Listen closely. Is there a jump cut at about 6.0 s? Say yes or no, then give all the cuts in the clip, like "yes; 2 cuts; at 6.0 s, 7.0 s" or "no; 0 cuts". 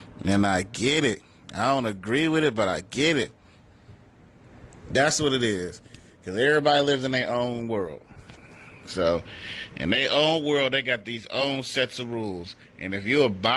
no; 0 cuts